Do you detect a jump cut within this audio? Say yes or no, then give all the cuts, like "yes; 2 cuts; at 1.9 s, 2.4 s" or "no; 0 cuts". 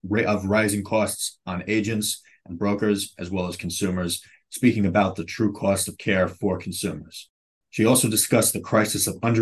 no; 0 cuts